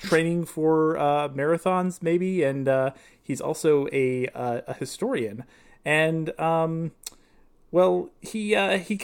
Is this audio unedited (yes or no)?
yes